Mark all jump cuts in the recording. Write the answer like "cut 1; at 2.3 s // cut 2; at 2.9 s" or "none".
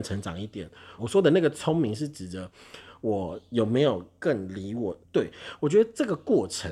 cut 1; at 1.0 s // cut 2; at 5.0 s